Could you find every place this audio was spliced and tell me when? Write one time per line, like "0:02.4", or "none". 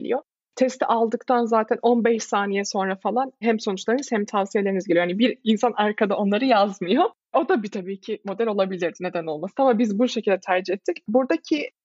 none